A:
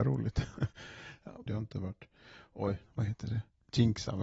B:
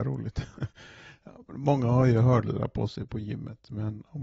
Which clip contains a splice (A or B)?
A